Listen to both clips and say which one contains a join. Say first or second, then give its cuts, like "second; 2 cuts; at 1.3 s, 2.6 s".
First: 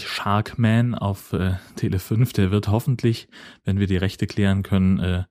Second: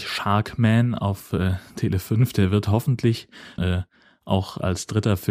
second; 1 cut; at 3.6 s